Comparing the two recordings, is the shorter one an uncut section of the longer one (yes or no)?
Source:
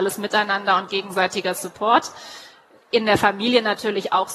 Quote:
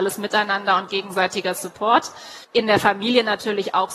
no